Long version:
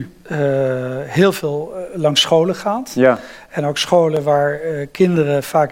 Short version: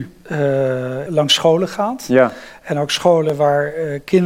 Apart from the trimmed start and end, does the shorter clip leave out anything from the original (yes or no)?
yes